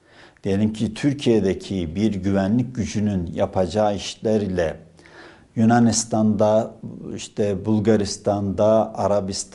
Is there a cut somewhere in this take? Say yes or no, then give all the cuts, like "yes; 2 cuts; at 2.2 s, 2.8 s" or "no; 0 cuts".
no; 0 cuts